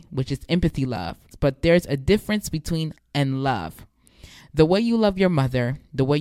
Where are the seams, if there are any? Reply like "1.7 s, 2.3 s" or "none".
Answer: 1.3 s, 3.0 s, 4.4 s